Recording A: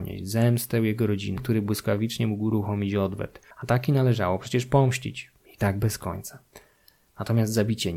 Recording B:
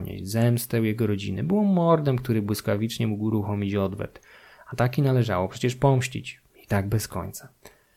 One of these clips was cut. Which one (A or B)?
A